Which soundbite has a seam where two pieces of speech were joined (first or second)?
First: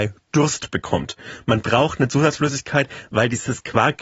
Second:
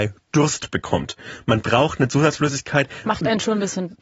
second